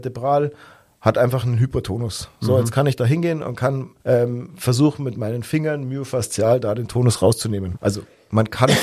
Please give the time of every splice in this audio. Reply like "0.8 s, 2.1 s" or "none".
4.0 s, 7.7 s